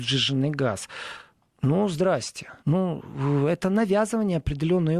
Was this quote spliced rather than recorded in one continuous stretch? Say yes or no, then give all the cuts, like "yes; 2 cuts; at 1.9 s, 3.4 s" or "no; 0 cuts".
yes; 1 cut; at 2.6 s